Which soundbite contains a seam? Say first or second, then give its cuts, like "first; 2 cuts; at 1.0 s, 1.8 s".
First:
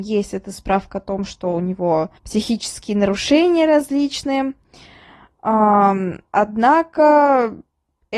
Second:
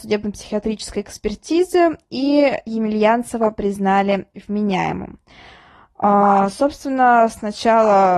first; 1 cut; at 2.2 s